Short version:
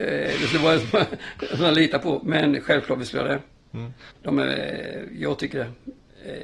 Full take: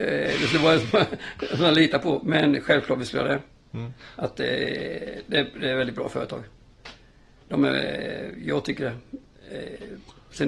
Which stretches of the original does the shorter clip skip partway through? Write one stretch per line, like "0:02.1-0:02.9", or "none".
0:04.1-0:07.4